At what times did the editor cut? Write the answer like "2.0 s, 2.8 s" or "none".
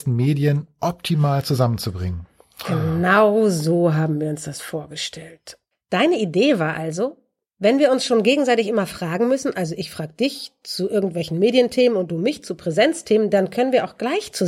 5.7 s